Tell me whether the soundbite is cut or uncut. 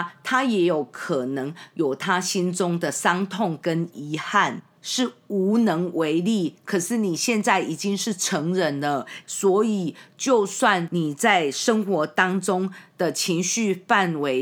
cut